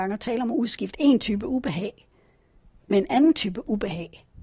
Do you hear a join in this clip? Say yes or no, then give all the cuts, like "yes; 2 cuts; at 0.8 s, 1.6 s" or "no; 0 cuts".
no; 0 cuts